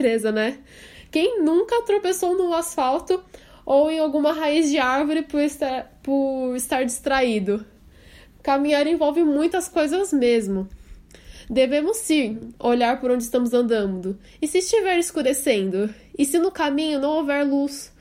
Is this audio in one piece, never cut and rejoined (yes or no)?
yes